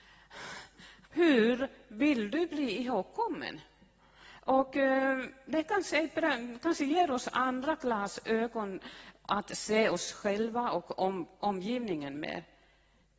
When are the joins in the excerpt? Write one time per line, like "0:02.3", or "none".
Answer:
0:01.0